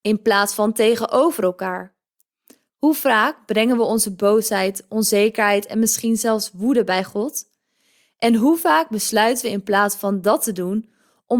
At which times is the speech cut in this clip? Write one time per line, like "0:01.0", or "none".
0:02.7